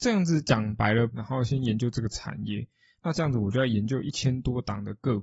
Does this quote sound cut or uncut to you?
cut